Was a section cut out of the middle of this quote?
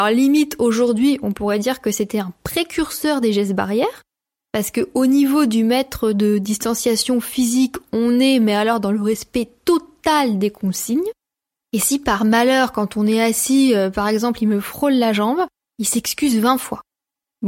yes; 1 cut; at 15.6 s

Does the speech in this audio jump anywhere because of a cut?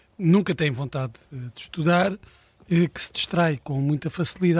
no; 0 cuts

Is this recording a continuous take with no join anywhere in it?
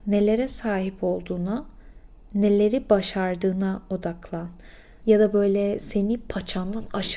no; 1 cut; at 5.0 s

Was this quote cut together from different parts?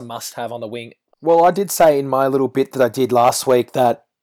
yes; 1 cut; at 1.1 s

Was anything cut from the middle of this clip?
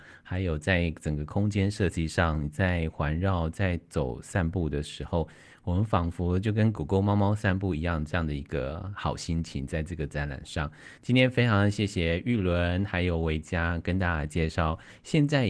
no; 0 cuts

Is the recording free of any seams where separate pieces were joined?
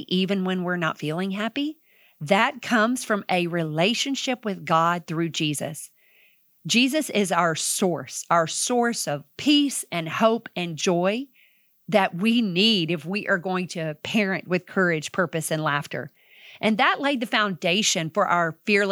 yes; 0 cuts

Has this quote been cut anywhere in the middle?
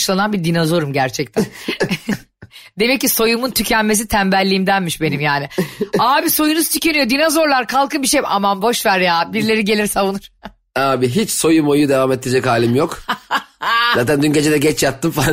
no; 0 cuts

